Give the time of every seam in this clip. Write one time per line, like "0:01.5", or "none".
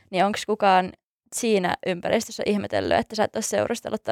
none

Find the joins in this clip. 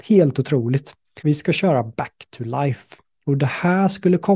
0:01.2

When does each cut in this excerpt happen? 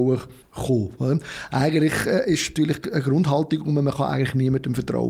none

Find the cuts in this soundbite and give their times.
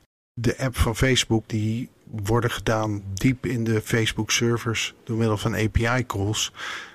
0:01.4

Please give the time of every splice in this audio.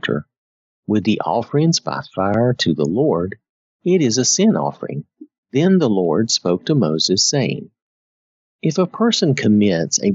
0:05.4

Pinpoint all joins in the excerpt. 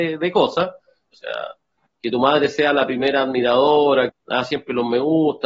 0:01.1
0:04.1

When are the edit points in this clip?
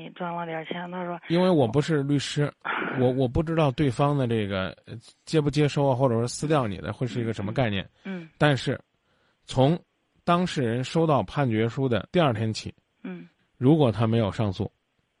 0:12.1
0:13.4

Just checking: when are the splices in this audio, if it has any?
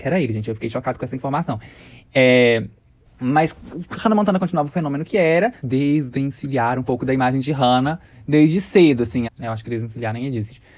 0:03.1
0:05.6
0:09.2

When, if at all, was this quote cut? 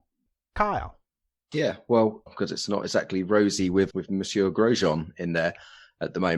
0:02.3
0:03.9

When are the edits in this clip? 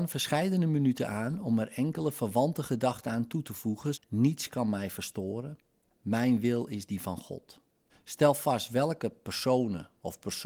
0:03.9
0:07.9

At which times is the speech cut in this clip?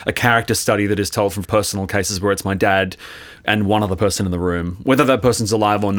0:01.4

